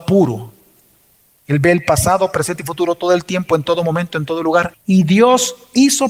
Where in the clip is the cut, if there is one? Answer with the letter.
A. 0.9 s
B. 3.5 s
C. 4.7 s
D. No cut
C